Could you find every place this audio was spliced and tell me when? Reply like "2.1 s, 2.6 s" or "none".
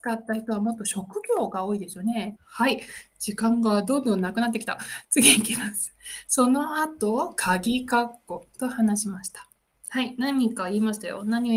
2.4 s